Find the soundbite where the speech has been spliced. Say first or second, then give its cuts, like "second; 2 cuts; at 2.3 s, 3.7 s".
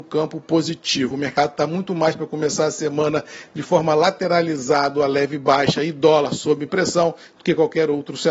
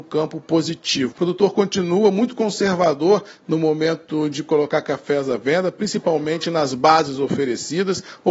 second; 1 cut; at 1.1 s